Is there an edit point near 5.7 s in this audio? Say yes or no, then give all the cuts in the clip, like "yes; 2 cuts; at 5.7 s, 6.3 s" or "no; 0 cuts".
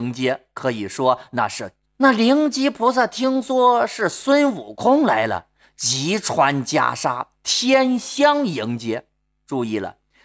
no; 1 cut; at 1.8 s